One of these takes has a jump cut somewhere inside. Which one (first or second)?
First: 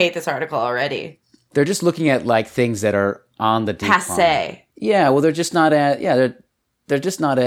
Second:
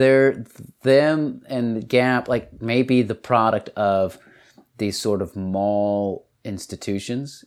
first